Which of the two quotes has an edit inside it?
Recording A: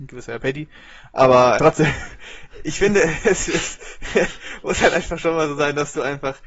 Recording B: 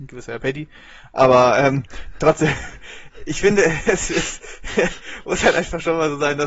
A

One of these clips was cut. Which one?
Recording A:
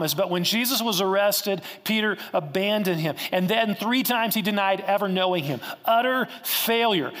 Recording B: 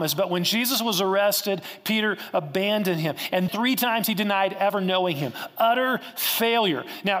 B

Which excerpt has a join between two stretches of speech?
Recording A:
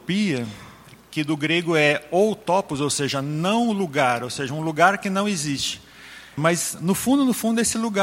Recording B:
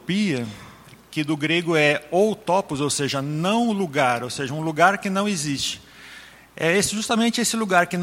A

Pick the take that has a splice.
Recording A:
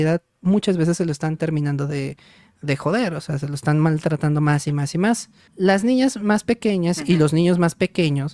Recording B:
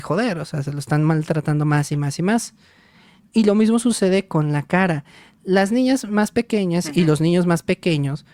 A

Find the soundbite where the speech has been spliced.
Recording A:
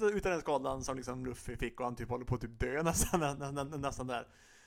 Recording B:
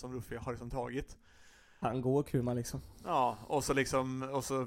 B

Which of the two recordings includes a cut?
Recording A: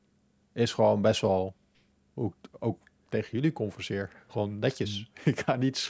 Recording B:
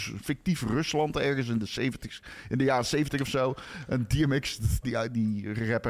B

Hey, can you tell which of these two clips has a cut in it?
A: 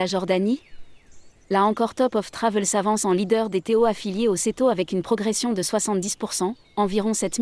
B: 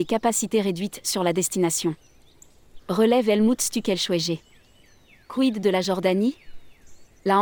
B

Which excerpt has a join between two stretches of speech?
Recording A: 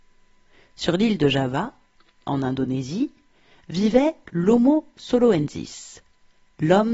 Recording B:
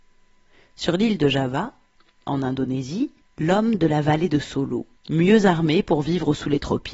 B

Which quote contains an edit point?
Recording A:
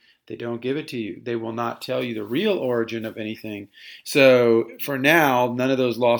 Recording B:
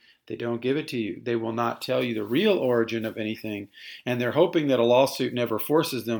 A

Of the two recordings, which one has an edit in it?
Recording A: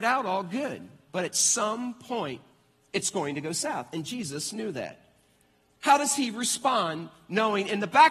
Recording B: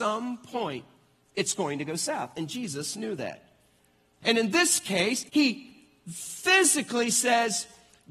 B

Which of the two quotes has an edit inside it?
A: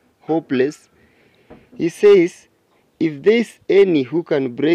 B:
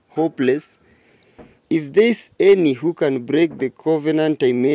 B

